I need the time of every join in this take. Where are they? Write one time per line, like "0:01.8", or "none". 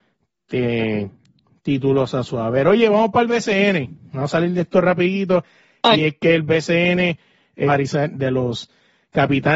0:06.0
0:07.7